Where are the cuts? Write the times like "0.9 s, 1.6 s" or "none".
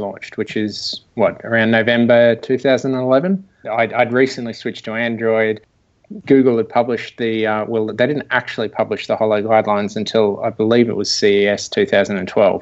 3.6 s